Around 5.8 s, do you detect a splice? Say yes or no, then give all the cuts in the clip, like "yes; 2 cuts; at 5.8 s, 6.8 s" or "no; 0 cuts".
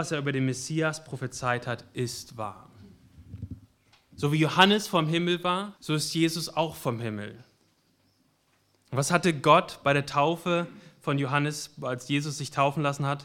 yes; 1 cut; at 5.8 s